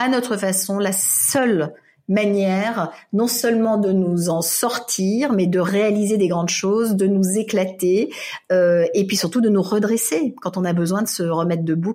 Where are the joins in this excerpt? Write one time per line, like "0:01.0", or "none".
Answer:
none